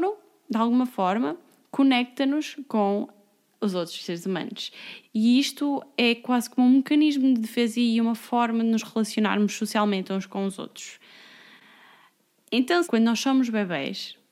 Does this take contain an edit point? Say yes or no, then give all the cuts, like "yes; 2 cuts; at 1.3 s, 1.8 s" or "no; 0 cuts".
yes; 2 cuts; at 5.0 s, 12.8 s